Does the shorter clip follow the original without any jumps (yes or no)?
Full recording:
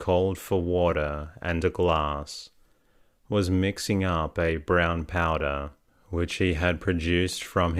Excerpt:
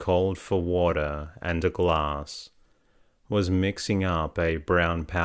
yes